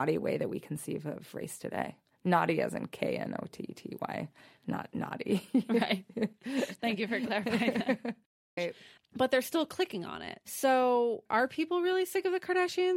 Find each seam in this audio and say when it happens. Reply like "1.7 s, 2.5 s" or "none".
8.6 s